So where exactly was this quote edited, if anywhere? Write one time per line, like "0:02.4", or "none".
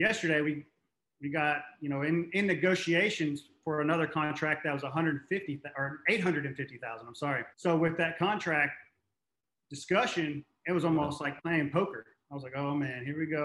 0:07.5